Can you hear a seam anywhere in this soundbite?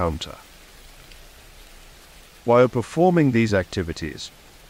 yes; 1 cut; at 2.4 s

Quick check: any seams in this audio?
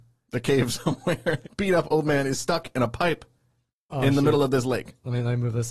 yes; 1 cut; at 1.4 s

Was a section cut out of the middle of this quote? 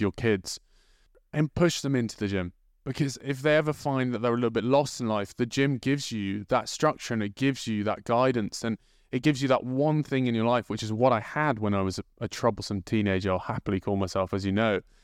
no; 0 cuts

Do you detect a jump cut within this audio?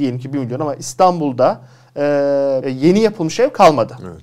yes; 1 cut; at 2.6 s

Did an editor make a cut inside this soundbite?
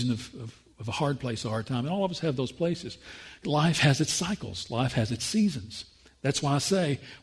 no; 0 cuts

